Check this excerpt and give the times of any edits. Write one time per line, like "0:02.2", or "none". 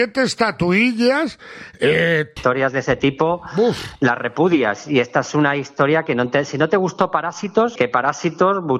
0:02.4
0:07.8